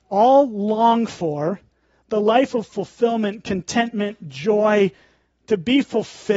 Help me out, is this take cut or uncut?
cut